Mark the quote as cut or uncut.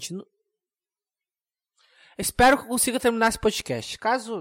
uncut